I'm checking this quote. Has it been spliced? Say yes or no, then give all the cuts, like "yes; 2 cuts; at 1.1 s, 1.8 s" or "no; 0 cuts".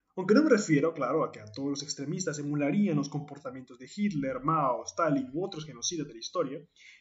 no; 0 cuts